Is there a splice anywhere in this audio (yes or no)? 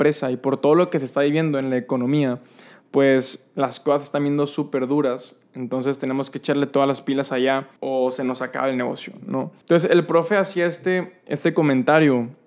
yes